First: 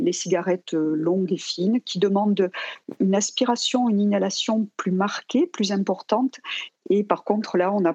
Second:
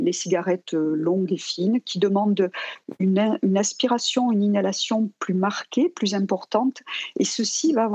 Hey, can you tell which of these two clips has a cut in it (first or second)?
first